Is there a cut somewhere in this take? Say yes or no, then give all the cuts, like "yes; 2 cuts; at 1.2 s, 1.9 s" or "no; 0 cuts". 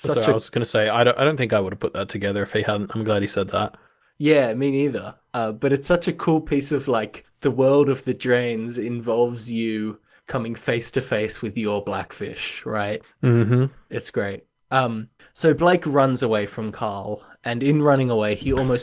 no; 0 cuts